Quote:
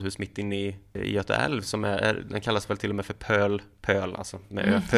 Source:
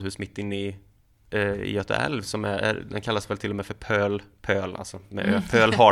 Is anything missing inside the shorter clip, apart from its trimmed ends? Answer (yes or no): yes